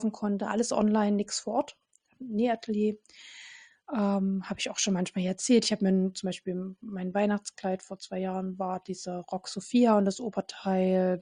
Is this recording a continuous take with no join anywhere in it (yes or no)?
yes